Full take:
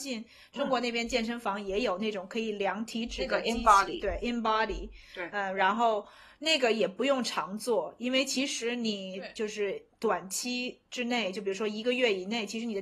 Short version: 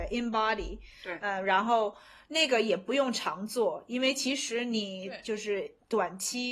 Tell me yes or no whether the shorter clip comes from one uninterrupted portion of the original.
yes